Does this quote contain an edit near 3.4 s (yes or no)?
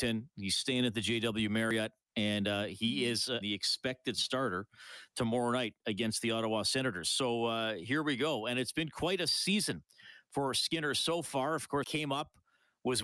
yes